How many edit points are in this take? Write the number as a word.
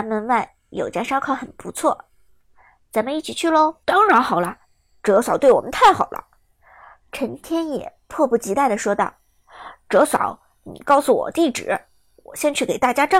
one